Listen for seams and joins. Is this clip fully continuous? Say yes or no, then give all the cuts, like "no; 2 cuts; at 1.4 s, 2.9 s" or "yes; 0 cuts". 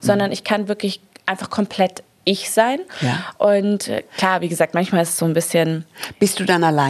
yes; 0 cuts